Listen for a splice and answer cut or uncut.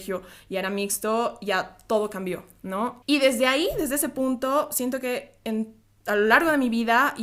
cut